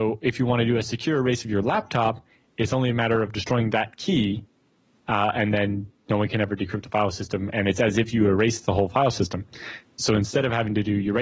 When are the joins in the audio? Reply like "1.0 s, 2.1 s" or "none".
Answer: none

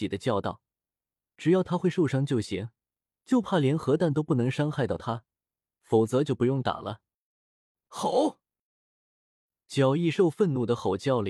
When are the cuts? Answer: none

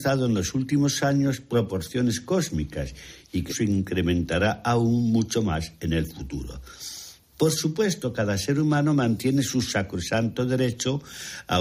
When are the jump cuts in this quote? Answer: 3.5 s

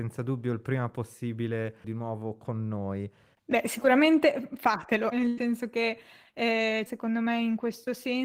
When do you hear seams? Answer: 3.3 s, 5.1 s, 6.9 s

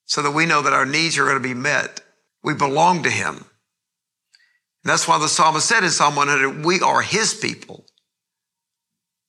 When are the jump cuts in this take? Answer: 2.3 s

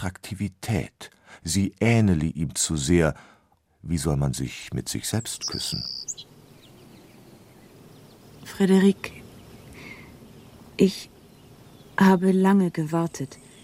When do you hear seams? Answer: 3.6 s

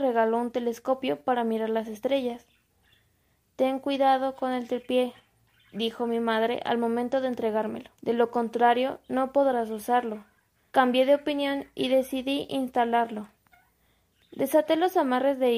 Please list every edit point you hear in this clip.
7.9 s, 10.7 s

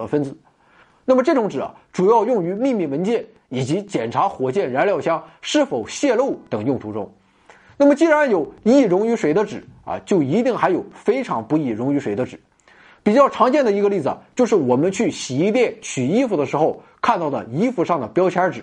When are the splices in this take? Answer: none

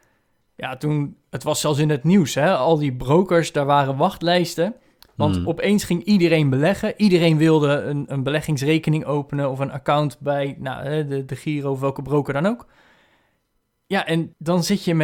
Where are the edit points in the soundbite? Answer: none

